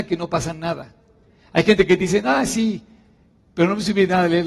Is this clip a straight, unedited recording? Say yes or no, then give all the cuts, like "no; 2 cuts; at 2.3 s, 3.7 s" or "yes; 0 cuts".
yes; 0 cuts